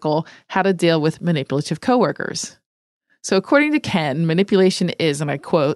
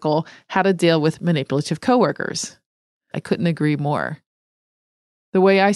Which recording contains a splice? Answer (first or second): second